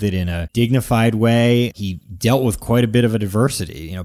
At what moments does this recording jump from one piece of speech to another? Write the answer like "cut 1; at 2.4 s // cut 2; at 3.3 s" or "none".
cut 1; at 1.7 s